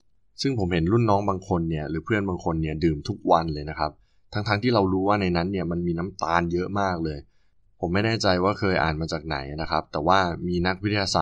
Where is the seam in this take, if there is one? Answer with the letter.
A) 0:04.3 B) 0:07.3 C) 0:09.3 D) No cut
D